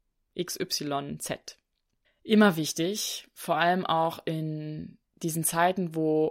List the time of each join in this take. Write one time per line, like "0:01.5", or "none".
0:02.0

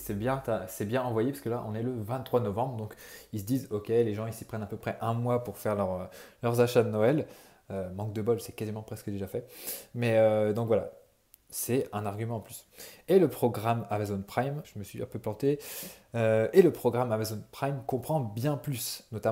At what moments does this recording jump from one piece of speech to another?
0:14.6

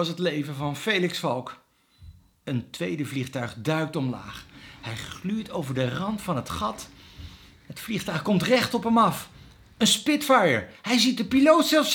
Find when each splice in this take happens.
none

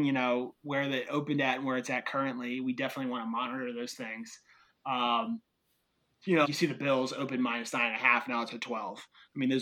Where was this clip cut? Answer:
0:06.4

